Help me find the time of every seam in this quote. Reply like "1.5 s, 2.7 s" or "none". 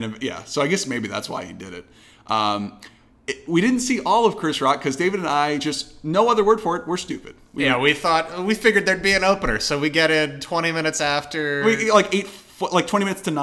none